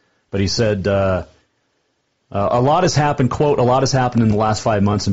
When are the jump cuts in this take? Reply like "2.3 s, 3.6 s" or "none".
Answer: 2.2 s